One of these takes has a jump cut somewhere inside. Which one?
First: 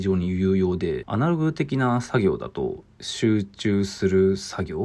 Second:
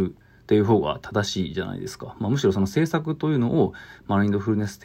first; 1 cut; at 1.0 s

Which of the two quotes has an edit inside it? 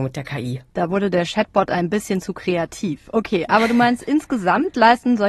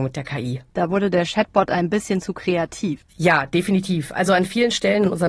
second; 1 cut; at 3.0 s

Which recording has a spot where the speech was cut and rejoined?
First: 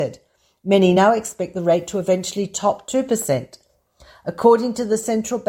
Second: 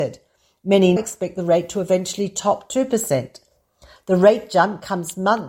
second; 2 cuts; at 1.0 s, 4.0 s

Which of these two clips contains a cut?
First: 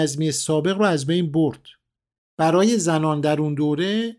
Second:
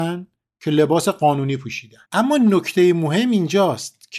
second; 1 cut; at 2.0 s

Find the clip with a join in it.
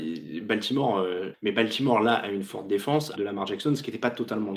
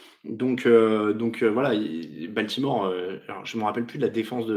first; 2 cuts; at 1.3 s, 3.1 s

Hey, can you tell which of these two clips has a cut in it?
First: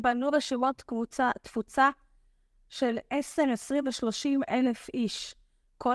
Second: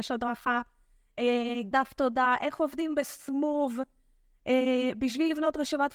second; 1 cut; at 1.7 s

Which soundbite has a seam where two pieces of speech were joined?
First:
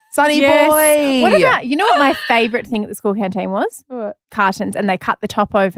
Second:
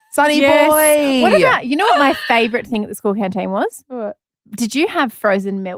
first; 1 cut; at 4.2 s

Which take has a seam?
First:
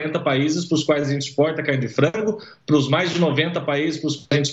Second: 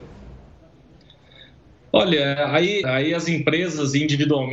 second; 1 cut; at 2.8 s

